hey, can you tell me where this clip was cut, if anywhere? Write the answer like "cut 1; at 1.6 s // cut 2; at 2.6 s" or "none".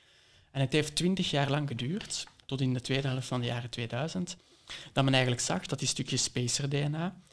none